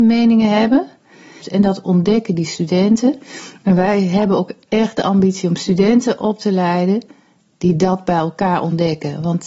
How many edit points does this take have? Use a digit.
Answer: 1